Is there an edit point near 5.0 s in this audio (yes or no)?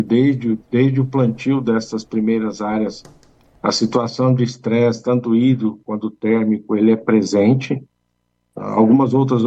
no